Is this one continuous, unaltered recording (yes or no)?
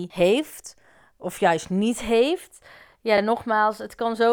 yes